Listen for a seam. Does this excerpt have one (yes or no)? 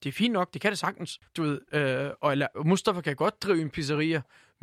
yes